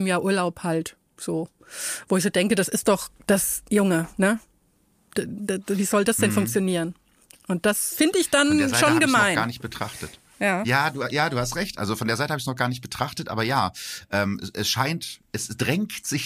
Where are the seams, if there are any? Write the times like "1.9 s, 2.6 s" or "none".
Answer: none